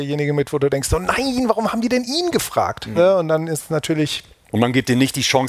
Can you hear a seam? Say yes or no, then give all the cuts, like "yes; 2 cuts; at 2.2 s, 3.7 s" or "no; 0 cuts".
yes; 1 cut; at 3.0 s